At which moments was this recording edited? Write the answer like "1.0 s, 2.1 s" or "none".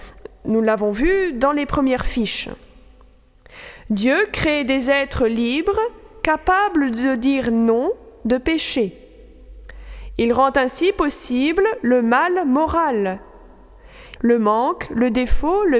14.2 s